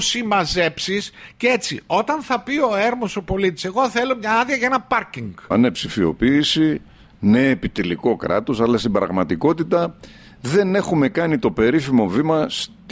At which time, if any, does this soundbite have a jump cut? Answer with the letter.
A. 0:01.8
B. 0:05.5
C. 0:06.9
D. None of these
B